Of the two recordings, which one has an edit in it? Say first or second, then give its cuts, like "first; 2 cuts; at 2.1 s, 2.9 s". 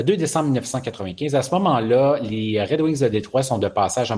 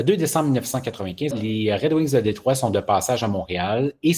second; 1 cut; at 1.3 s